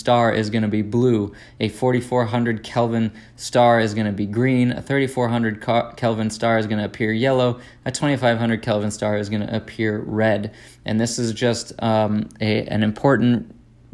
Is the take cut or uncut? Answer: uncut